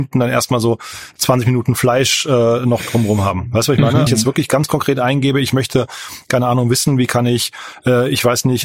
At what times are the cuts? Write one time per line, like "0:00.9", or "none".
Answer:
0:04.1